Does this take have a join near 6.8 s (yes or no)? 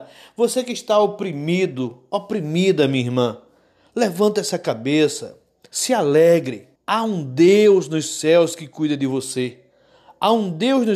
yes